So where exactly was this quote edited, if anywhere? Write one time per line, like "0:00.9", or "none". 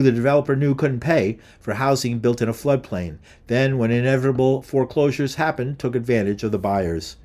none